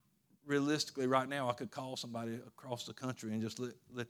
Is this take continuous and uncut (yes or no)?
yes